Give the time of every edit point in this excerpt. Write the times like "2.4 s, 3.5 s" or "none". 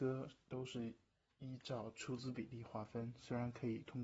none